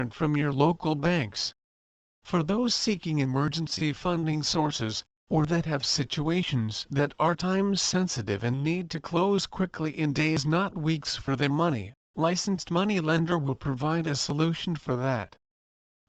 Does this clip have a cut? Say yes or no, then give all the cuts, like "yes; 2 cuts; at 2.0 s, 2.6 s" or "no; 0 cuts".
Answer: no; 0 cuts